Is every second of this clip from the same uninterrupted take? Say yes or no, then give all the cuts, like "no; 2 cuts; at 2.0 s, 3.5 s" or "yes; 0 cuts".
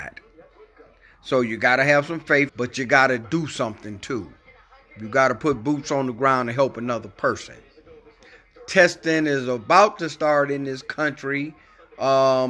no; 1 cut; at 2.5 s